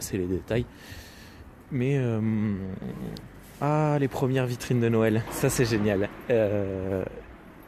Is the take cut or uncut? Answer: cut